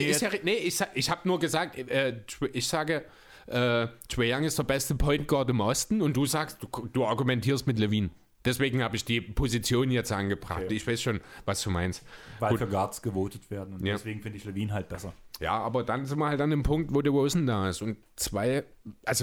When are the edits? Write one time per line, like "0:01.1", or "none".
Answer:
none

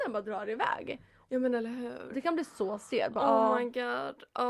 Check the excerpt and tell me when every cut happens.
none

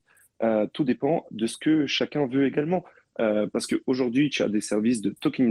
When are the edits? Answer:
none

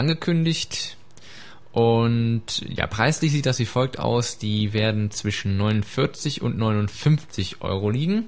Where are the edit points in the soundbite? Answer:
none

